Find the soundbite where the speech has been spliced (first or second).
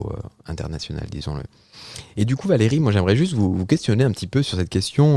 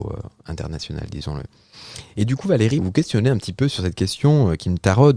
second